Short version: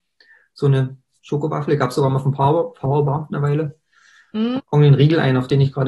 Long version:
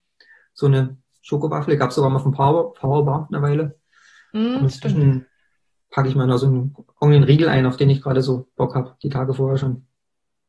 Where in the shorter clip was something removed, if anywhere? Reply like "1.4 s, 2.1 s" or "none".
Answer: 4.6 s